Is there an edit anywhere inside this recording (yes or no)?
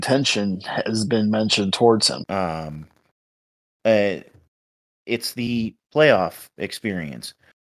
yes